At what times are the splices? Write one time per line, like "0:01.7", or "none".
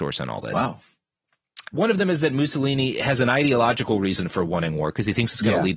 0:01.7